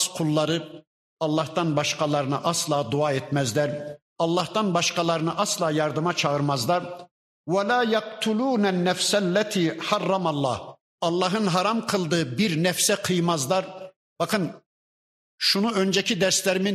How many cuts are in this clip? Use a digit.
2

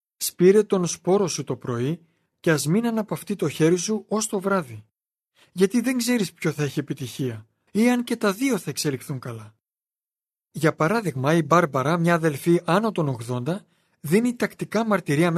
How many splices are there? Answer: 1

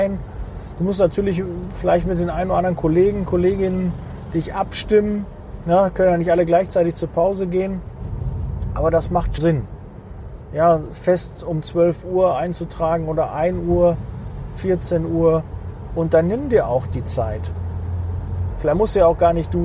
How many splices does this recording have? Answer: 2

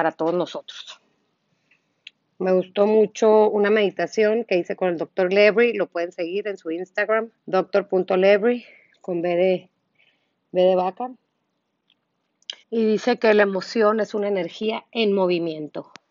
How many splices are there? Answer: 2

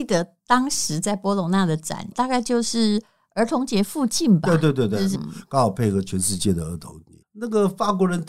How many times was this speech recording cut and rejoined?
3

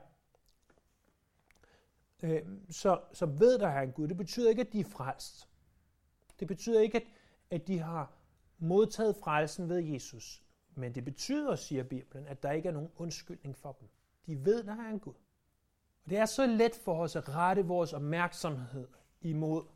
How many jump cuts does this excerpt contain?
1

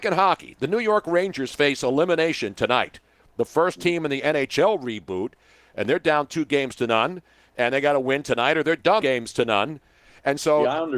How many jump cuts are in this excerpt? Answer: 1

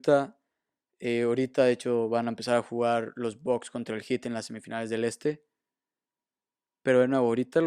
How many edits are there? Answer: 0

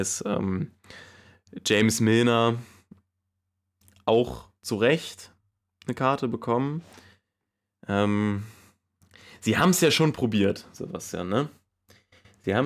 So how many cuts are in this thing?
0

